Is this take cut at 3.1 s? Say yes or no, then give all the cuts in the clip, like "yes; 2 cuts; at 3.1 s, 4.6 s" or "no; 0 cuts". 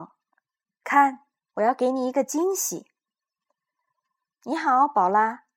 no; 1 cut; at 4.3 s